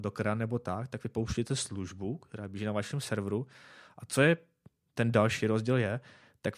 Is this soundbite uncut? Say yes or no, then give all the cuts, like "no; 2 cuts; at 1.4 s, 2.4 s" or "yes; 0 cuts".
yes; 0 cuts